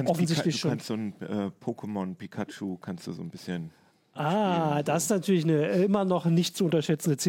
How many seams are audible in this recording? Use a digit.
0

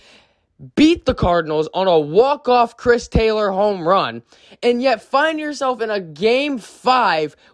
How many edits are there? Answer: 0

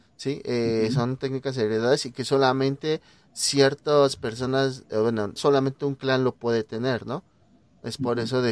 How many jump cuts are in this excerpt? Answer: 1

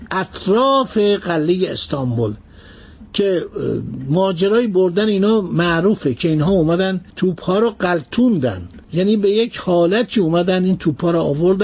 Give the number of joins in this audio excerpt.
2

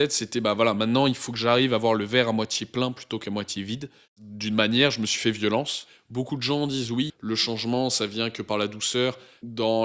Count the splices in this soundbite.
1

